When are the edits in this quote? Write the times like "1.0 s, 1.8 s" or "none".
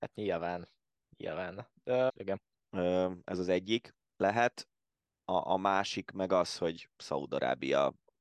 2.1 s